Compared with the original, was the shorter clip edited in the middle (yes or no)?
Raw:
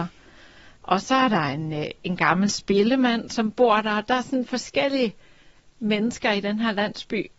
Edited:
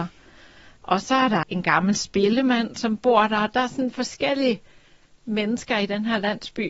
yes